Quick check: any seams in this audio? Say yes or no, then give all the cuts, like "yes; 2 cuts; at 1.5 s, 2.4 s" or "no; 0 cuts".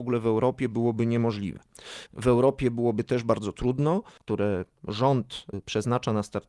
yes; 2 cuts; at 2.1 s, 4.2 s